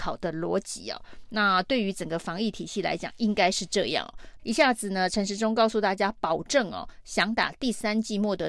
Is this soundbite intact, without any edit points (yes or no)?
no